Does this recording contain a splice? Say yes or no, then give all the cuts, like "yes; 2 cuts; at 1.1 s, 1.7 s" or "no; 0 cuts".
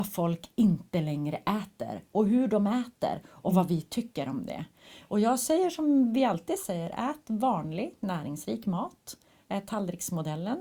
no; 0 cuts